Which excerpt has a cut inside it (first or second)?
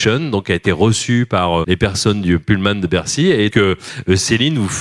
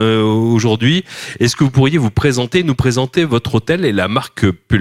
first